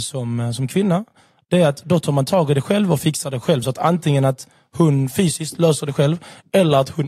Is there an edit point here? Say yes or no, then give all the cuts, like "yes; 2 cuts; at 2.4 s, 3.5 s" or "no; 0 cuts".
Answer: no; 0 cuts